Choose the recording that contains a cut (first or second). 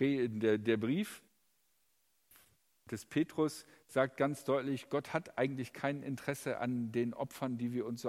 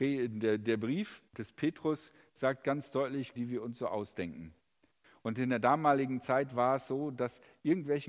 second